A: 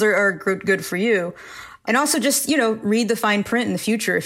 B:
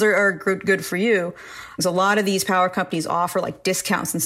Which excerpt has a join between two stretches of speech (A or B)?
B